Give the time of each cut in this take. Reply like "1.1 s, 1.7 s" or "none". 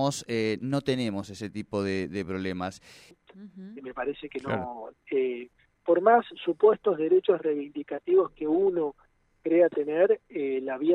3.1 s, 4.9 s